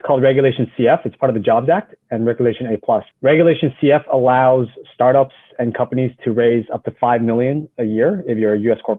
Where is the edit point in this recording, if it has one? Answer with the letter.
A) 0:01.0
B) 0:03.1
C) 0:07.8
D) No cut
B